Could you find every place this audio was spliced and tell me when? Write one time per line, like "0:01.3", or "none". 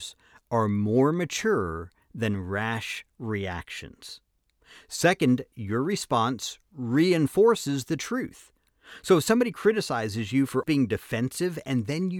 0:10.6

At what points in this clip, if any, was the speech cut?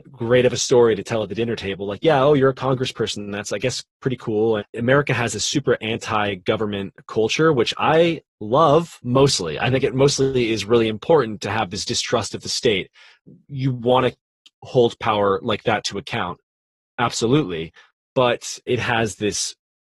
0:04.6
0:18.7

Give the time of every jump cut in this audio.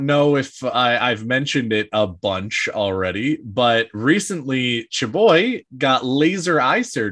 none

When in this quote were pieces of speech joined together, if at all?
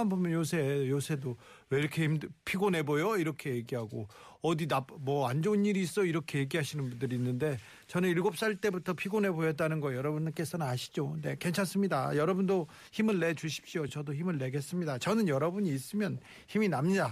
none

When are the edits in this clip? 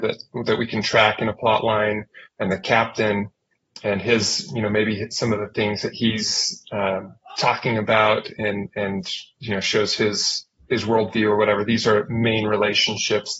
none

